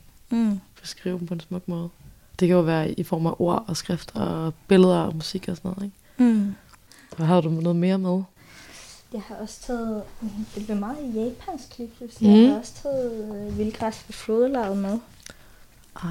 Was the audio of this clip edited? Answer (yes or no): no